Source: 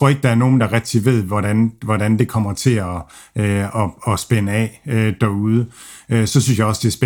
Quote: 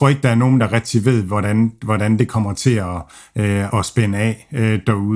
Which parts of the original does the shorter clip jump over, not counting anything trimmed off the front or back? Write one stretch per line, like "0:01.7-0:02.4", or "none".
0:03.7-0:04.1